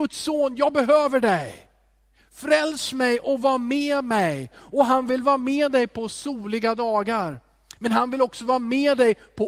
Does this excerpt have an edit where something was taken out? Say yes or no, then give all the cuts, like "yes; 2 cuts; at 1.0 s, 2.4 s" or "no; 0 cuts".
yes; 1 cut; at 4.5 s